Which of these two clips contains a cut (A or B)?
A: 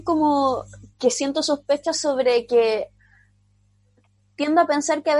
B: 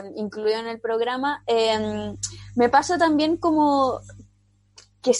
A